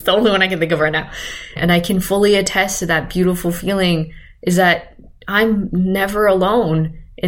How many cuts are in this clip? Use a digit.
1